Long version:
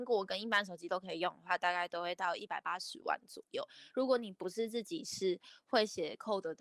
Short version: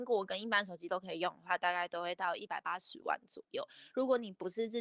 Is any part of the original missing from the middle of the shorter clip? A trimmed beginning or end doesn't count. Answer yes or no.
no